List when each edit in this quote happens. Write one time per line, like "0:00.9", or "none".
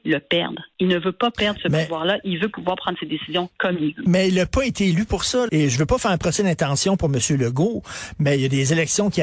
0:05.5